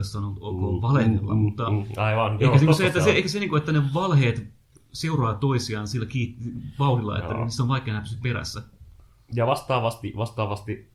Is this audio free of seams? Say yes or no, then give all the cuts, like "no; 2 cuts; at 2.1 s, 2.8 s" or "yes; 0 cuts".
yes; 0 cuts